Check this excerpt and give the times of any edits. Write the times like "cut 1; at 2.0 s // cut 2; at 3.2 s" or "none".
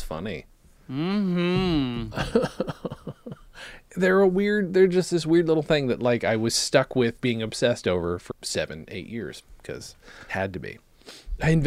cut 1; at 7.2 s // cut 2; at 8.3 s // cut 3; at 10.3 s